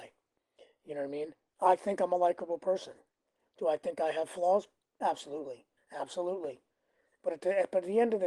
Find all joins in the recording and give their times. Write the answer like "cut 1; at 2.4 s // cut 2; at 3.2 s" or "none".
cut 1; at 5.8 s